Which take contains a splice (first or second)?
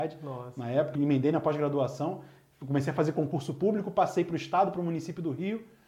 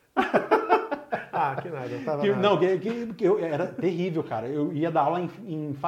first